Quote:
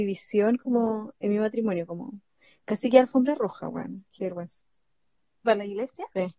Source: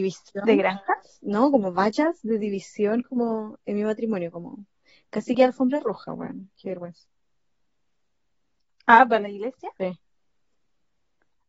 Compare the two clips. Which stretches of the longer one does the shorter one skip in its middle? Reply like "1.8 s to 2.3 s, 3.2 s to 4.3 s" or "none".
7.9 s to 9.1 s